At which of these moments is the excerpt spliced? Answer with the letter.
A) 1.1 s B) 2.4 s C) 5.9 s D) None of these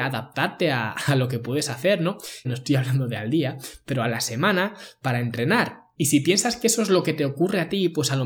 B